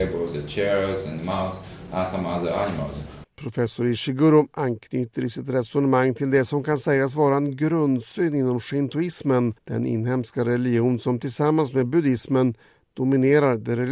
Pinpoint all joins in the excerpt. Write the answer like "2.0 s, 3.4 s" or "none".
3.2 s, 9.6 s